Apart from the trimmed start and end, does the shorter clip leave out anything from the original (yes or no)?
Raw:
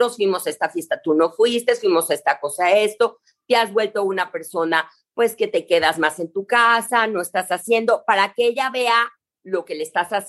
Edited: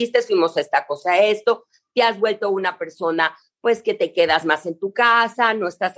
no